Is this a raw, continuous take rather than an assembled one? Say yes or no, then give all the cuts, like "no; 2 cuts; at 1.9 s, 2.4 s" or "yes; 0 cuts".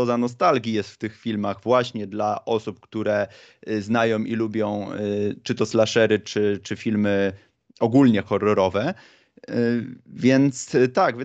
yes; 0 cuts